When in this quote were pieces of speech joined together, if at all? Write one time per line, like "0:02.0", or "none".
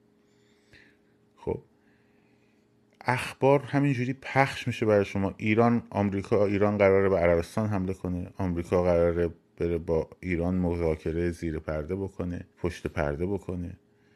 0:12.5